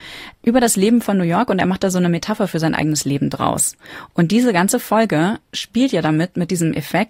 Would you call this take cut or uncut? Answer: uncut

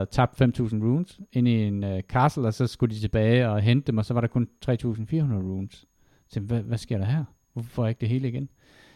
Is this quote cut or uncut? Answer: cut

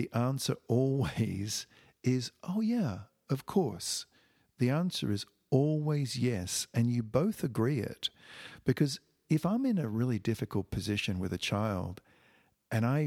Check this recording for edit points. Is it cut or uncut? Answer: uncut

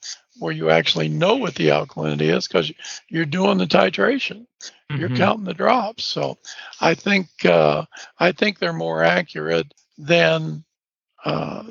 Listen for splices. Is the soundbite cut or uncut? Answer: uncut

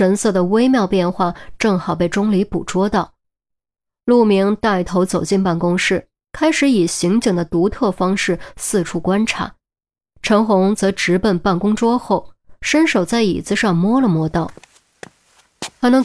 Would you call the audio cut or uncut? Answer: uncut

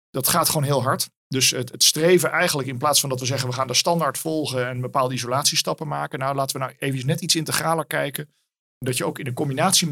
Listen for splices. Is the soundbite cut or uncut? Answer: uncut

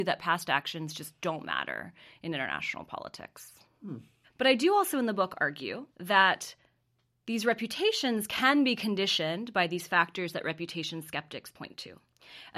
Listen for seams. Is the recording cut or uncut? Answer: cut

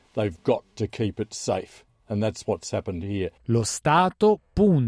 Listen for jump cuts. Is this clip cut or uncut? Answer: cut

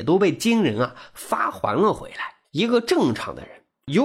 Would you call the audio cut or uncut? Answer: cut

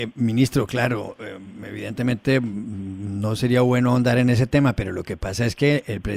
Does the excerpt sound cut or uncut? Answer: uncut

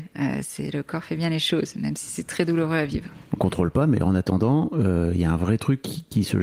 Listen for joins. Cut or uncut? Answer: cut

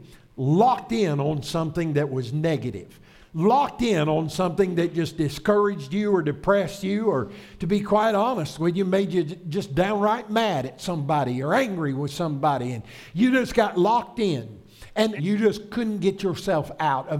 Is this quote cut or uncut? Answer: cut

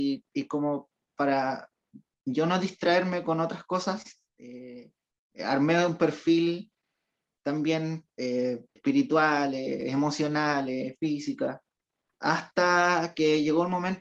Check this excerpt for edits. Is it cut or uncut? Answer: cut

